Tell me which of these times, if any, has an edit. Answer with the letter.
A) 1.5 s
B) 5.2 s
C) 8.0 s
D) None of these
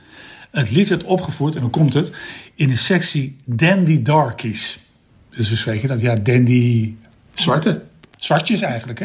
D